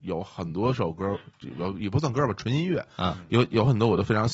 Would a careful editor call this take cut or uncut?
uncut